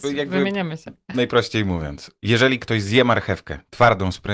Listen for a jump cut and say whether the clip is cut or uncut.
uncut